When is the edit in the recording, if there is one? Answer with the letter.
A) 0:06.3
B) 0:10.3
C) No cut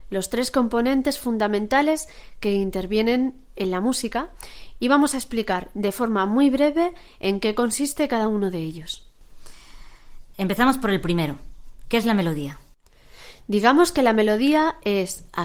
B